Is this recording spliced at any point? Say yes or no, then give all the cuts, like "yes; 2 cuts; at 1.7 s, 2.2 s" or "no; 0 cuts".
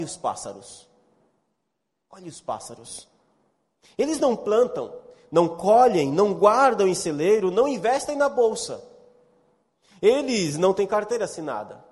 no; 0 cuts